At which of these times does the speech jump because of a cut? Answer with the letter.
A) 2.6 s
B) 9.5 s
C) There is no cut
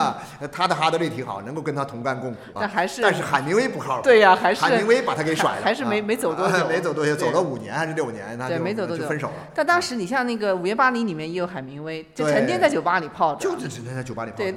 C